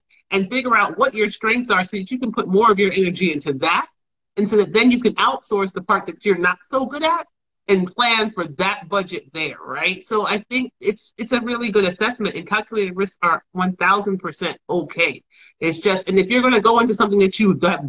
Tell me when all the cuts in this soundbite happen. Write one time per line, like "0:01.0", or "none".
none